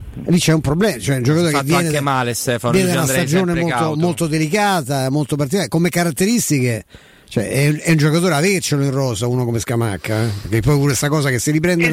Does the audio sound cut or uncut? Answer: uncut